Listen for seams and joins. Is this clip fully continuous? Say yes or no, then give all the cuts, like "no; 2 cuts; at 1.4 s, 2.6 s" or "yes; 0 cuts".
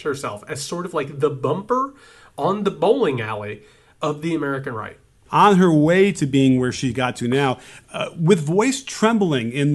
no; 1 cut; at 5.3 s